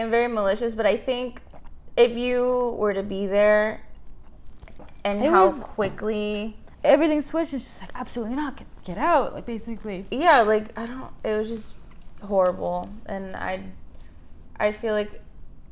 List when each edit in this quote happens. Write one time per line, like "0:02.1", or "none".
none